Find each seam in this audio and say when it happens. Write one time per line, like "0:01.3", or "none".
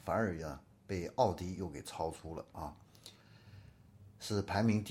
none